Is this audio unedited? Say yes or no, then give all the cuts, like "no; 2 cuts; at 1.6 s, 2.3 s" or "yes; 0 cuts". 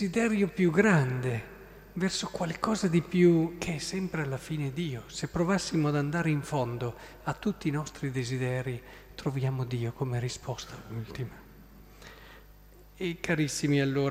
yes; 0 cuts